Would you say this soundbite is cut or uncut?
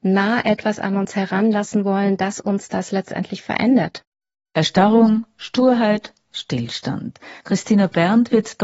cut